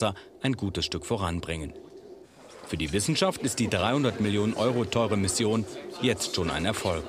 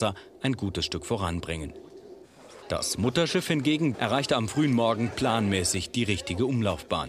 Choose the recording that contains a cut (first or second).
second